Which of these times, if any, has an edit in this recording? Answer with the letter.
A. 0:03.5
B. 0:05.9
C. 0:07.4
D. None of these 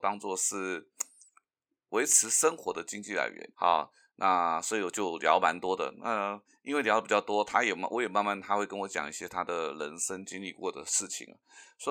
A